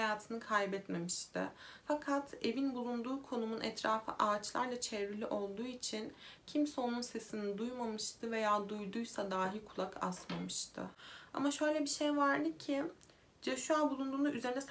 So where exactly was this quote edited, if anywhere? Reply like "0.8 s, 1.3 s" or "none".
1.8 s